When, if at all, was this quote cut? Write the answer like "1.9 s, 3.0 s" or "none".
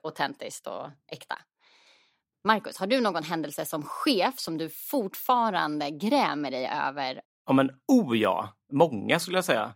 none